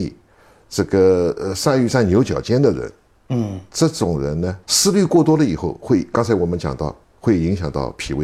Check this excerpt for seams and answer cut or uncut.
cut